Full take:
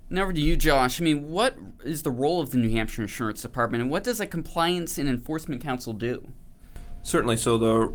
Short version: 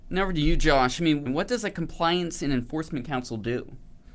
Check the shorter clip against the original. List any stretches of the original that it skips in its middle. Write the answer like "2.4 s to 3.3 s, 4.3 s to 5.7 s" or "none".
1.3 s to 3.8 s

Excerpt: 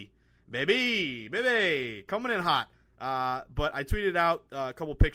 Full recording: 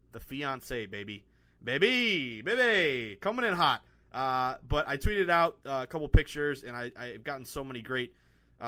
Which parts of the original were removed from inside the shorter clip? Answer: none

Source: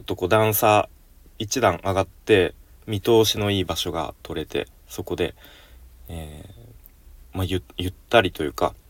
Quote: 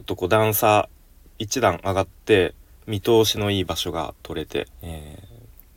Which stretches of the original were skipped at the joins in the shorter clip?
4.7 s to 6.0 s

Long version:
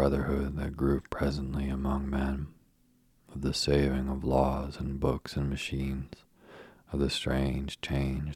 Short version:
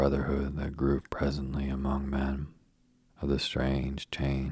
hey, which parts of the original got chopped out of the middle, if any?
3.1 s to 6.8 s

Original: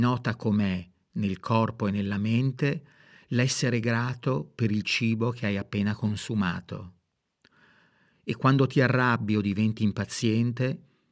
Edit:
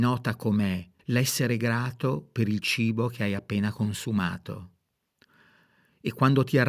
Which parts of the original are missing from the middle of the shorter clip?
1.0 s to 3.2 s

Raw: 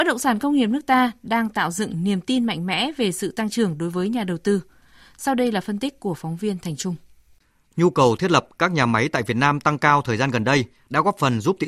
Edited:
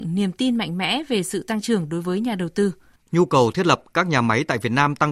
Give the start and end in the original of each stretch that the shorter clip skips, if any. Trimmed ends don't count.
4.8 s to 7.6 s

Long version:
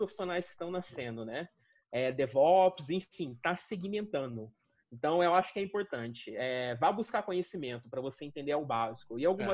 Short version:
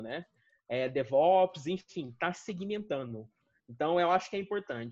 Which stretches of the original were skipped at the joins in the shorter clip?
none

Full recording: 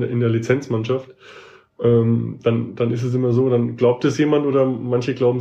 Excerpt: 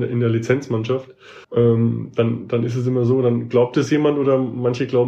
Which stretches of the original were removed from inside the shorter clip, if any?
1.4 s to 1.7 s

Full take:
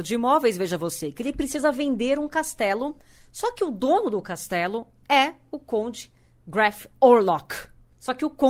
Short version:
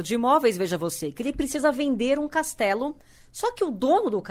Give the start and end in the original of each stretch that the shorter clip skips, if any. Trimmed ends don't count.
none

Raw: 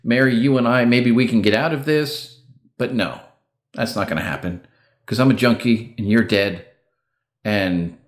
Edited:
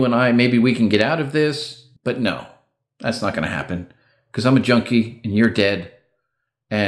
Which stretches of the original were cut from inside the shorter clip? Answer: 2.5 s to 2.7 s

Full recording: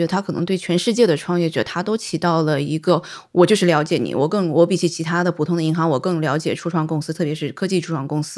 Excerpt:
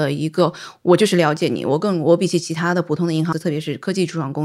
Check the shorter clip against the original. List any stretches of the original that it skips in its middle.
5.8 s to 7.1 s

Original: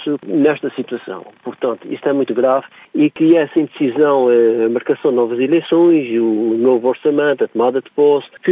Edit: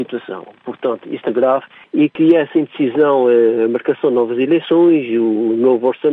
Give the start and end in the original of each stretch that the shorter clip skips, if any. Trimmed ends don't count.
2.1 s to 2.3 s

